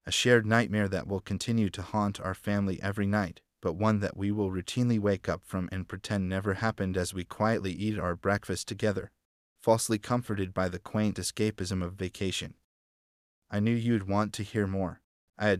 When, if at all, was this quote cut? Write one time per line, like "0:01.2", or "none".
0:13.4

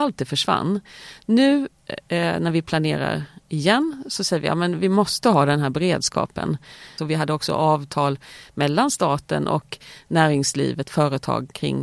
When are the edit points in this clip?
0:07.0

